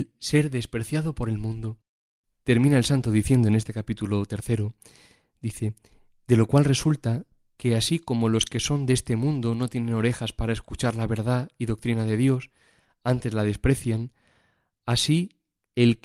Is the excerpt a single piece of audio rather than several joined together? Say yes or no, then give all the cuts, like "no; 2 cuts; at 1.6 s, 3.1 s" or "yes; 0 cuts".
yes; 0 cuts